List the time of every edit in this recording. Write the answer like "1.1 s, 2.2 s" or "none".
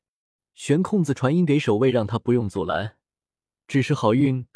3.6 s